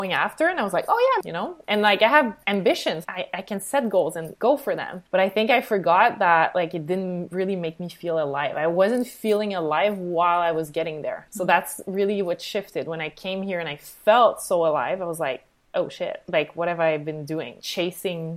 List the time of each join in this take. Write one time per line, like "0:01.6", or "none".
0:01.2
0:05.1